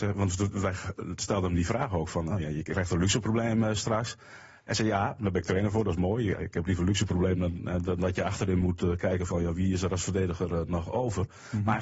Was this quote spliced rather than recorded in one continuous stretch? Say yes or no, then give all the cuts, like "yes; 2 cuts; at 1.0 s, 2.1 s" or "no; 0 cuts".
no; 0 cuts